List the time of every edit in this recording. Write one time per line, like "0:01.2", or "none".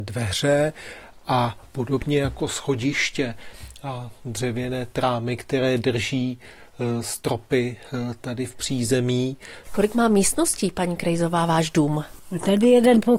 none